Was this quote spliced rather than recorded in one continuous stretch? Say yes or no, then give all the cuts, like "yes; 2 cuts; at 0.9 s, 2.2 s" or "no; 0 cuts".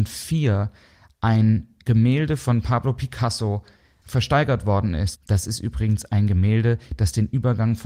yes; 2 cuts; at 4.0 s, 5.2 s